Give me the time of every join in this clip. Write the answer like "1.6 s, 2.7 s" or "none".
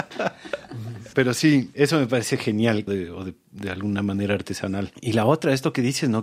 1.1 s, 2.9 s